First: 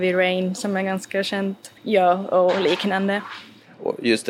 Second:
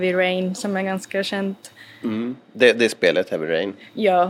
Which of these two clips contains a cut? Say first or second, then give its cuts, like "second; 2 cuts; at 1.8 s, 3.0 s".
first; 1 cut; at 1.8 s